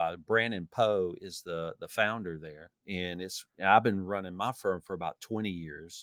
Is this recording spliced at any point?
yes; 1 cut; at 2.7 s

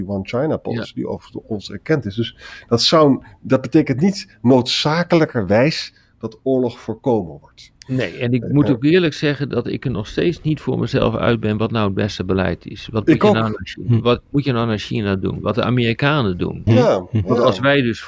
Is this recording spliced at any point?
yes; 1 cut; at 16.7 s

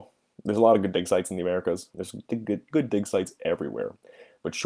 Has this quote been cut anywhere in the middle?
yes; 1 cut; at 1.9 s

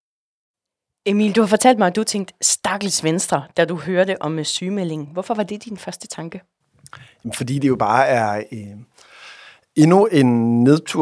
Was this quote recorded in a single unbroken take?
yes; 0 cuts

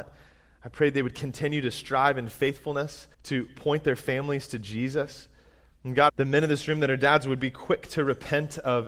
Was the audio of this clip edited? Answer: yes; 2 cuts; at 3.1 s, 6.1 s

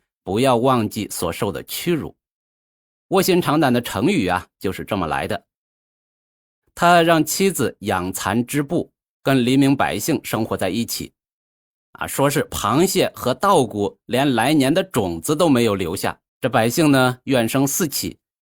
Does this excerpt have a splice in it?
yes; 2 cuts; at 11.7 s, 16.3 s

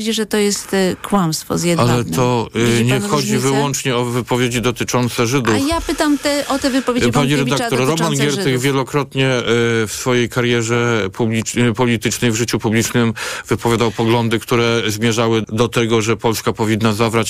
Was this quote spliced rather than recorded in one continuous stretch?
yes; 1 cut; at 15.4 s

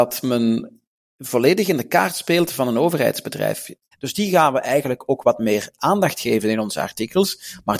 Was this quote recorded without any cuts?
no; 1 cut; at 3.9 s

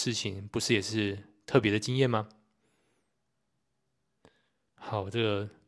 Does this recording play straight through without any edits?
yes; 0 cuts

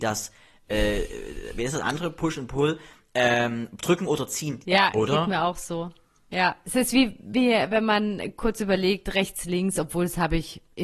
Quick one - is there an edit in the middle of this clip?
yes; 1 cut; at 4.6 s

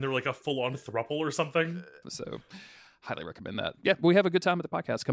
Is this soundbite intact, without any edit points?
no; 1 cut; at 2.0 s

